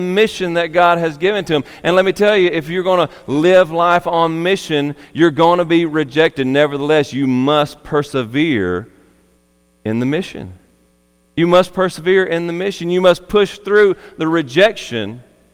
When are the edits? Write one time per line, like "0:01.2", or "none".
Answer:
none